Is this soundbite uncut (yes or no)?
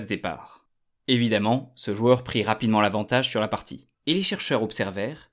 no